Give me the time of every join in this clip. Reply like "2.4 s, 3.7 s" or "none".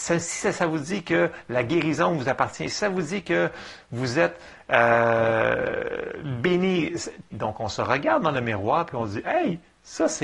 7.3 s

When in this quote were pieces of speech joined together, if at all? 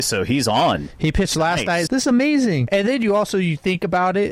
1.9 s

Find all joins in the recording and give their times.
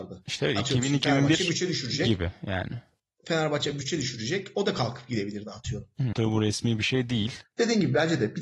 6.1 s, 7.4 s

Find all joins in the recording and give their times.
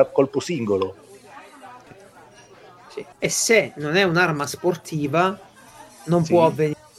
1.9 s, 3.1 s

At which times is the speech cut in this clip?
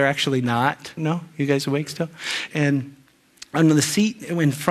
1.0 s, 2.5 s

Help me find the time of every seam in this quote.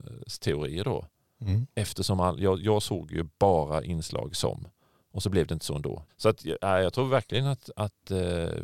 6.1 s

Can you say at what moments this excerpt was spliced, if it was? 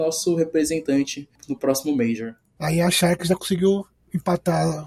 2.6 s

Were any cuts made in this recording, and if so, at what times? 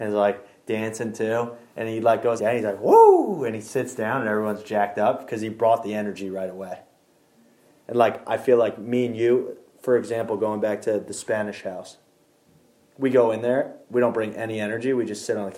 2.4 s

